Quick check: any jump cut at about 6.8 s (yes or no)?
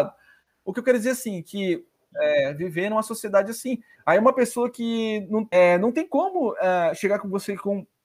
no